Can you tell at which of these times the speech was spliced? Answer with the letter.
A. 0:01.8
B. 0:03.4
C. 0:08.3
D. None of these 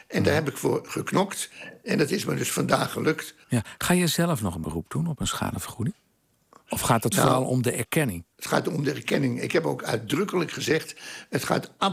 C